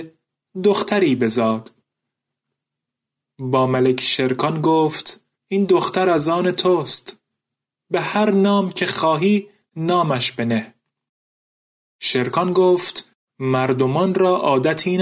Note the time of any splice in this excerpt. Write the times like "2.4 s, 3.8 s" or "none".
5.3 s